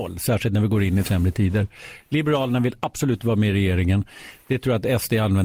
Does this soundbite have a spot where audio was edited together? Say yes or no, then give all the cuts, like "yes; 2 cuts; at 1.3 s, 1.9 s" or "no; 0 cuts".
no; 0 cuts